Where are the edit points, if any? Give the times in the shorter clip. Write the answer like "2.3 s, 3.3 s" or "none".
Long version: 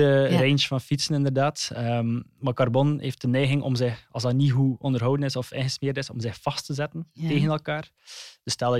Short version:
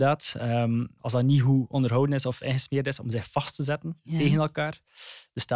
1.0 s